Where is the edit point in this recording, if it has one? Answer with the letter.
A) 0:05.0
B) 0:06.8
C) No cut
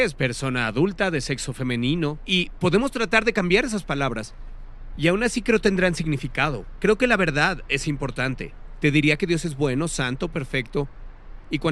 C